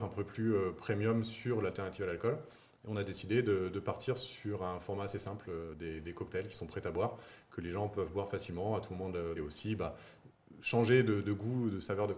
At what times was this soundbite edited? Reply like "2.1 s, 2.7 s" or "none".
9.4 s